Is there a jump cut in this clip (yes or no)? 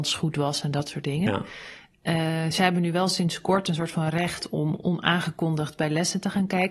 no